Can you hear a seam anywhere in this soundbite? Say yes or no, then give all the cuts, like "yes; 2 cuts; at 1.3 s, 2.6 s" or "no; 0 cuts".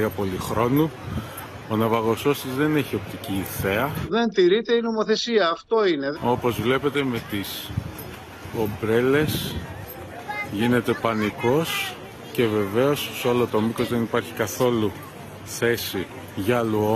yes; 1 cut; at 6.2 s